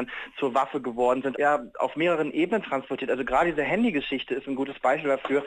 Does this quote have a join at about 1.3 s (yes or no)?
yes